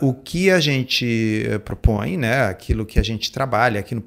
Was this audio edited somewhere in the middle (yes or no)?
no